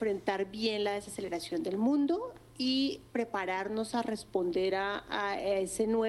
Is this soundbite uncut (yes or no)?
yes